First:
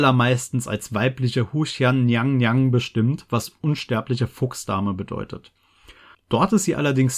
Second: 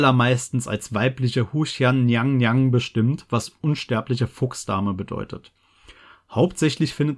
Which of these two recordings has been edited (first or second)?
first